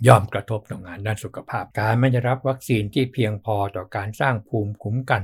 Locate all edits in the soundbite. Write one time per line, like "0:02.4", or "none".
0:01.7